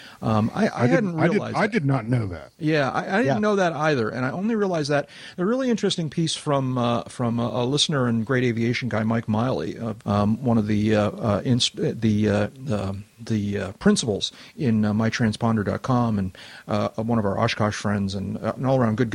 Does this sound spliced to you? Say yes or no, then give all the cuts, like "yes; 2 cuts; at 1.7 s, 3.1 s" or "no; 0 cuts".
yes; 1 cut; at 10.0 s